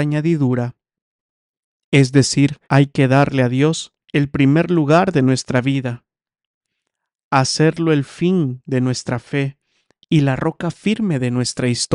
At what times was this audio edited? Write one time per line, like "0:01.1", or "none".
0:02.6
0:04.0